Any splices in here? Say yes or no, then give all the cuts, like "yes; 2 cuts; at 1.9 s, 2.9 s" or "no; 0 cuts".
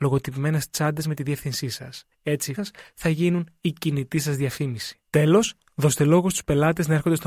yes; 1 cut; at 2.6 s